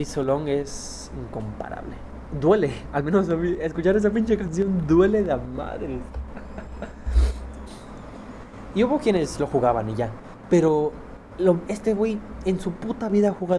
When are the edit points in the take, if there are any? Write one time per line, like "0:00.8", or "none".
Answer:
0:07.7
0:11.6